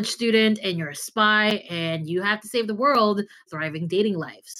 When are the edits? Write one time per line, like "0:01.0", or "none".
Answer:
0:03.5